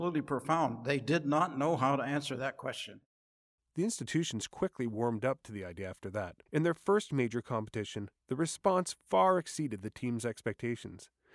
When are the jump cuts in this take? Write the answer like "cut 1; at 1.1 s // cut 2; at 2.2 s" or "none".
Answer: cut 1; at 6.5 s